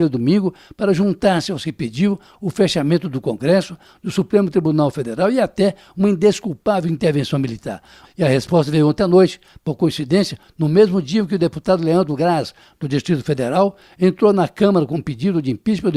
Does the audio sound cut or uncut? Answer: cut